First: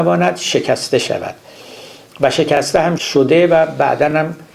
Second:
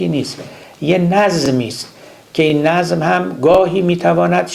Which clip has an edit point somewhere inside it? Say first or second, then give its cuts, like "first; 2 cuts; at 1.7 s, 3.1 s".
first; 1 cut; at 3.0 s